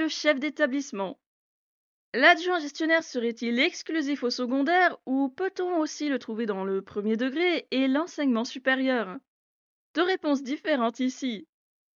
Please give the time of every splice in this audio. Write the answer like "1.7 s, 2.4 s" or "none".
none